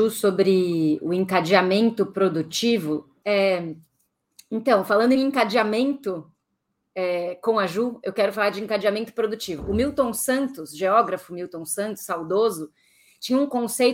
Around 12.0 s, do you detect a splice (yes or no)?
no